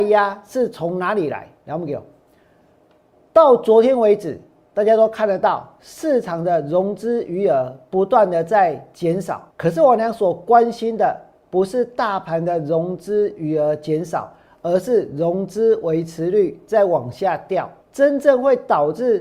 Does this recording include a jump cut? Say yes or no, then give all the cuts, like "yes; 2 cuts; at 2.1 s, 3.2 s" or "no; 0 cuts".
yes; 2 cuts; at 9.5 s, 17.8 s